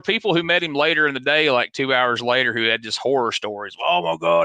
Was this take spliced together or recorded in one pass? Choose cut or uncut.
uncut